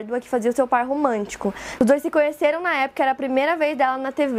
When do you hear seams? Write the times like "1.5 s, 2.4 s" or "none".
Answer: 1.8 s